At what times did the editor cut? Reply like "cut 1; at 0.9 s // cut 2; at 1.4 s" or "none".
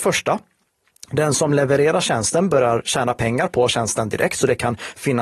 none